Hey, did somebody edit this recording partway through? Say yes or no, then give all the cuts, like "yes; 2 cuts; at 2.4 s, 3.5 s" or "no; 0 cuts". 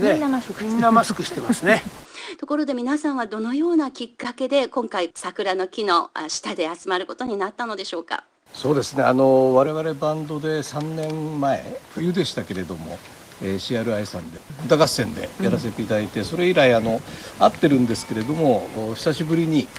no; 0 cuts